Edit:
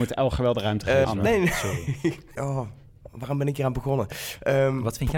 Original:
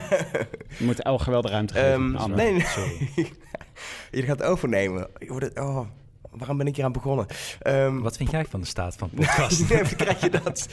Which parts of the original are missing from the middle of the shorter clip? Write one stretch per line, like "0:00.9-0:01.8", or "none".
0:01.9-0:02.2
0:03.5-0:05.5